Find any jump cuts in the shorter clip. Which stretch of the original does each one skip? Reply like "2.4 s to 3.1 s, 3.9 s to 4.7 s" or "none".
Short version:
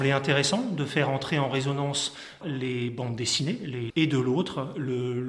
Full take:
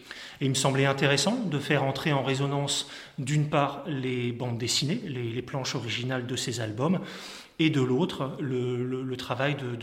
3.1 s to 3.8 s, 5.3 s to 7.5 s

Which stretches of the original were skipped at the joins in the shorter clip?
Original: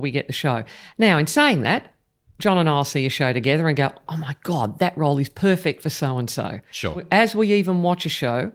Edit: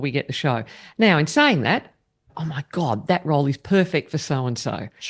2.3 s to 4.0 s

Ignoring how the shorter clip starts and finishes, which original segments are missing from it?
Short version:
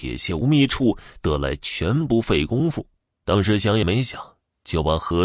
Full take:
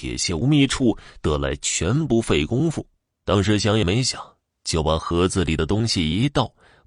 none

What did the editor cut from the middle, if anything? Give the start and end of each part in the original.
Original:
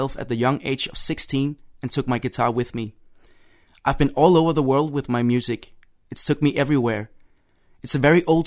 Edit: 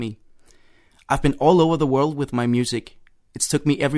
none

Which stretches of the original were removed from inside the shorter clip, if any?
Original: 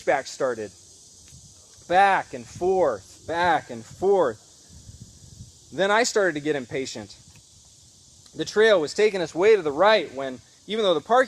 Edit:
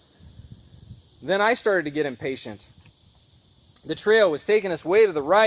none

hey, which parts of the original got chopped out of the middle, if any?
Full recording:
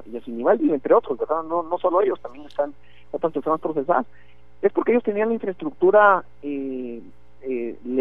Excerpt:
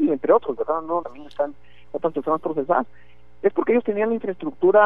1.6 s to 2.2 s

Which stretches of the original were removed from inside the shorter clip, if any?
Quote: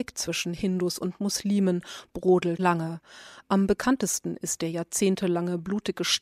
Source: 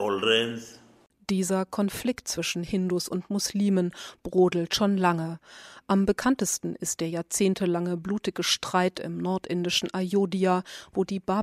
4.7 s to 5.0 s

